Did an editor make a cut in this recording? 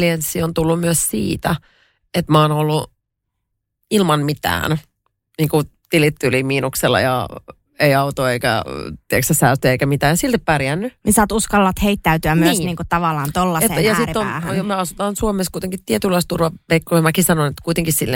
no; 0 cuts

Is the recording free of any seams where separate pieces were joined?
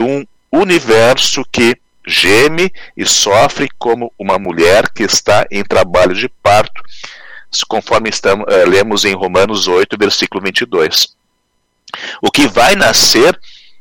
yes; 0 cuts

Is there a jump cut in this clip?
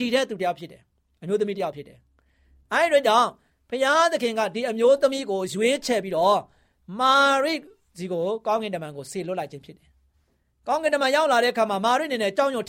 no; 0 cuts

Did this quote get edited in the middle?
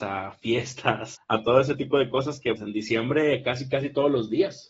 yes; 2 cuts; at 1.2 s, 2.6 s

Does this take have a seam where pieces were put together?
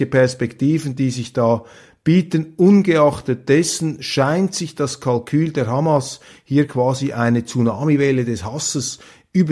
no; 0 cuts

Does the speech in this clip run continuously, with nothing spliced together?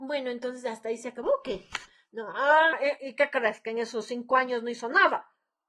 no; 1 cut; at 2.7 s

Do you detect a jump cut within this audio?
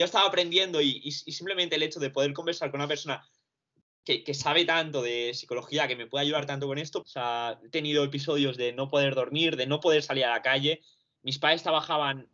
yes; 1 cut; at 7.0 s

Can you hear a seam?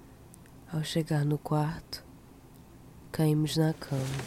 yes; 1 cut; at 3.0 s

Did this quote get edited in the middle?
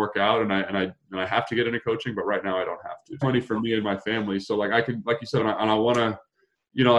yes; 2 cuts; at 3.2 s, 5.4 s

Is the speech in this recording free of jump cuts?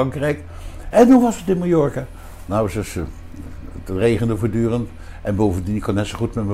no; 1 cut; at 0.9 s

